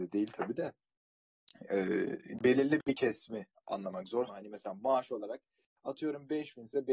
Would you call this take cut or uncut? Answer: cut